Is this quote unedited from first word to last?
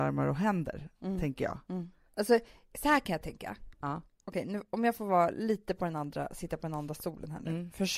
yes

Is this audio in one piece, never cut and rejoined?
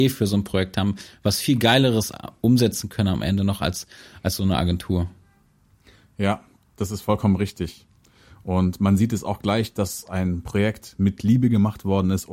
yes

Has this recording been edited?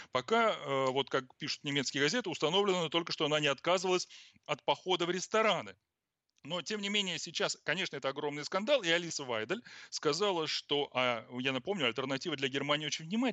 no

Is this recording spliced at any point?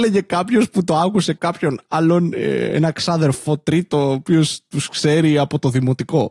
no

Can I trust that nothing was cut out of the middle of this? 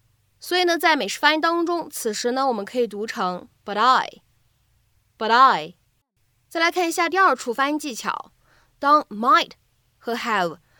yes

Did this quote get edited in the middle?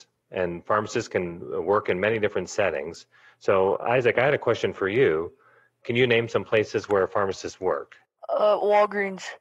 no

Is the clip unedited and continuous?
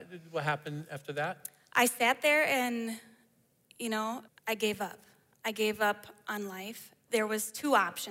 no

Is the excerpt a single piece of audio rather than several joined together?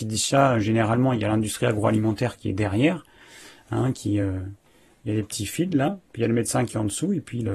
yes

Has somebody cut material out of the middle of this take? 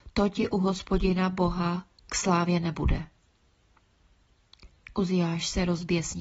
no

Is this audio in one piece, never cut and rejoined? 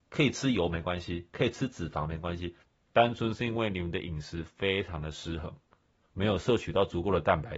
no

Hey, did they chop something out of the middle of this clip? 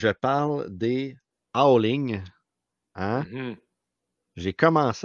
no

